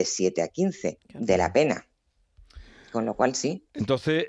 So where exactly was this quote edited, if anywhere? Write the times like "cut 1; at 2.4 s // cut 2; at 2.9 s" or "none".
cut 1; at 1.0 s